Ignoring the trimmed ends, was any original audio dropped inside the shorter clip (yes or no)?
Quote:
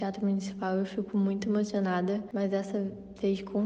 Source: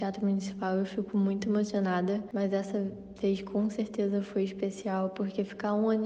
no